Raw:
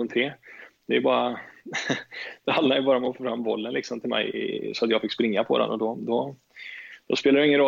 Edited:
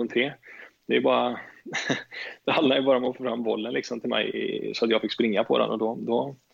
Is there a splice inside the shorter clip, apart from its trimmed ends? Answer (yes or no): no